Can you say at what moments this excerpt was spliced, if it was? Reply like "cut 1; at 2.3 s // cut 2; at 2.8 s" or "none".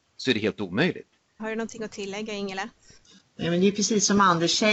cut 1; at 1.4 s